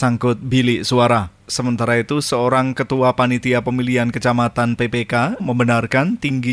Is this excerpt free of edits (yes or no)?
no